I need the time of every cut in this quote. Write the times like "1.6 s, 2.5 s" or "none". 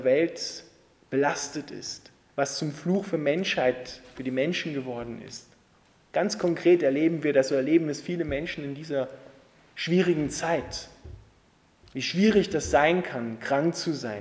2.3 s